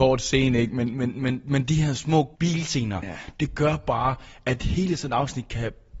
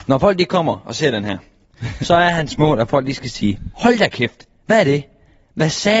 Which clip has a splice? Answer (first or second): first